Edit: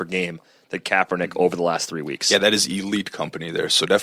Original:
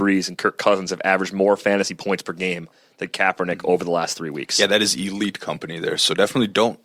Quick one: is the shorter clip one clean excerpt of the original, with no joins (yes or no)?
yes